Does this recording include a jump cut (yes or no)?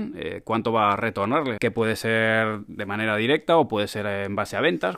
yes